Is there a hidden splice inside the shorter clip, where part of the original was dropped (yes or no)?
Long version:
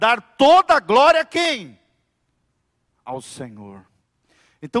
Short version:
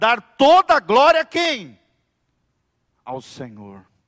no